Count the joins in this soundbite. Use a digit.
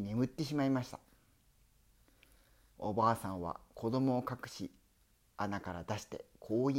0